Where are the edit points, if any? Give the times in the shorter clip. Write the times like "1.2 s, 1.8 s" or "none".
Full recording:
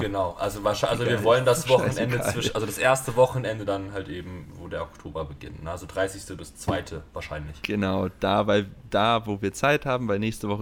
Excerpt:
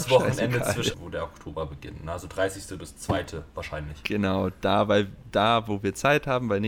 0.9 s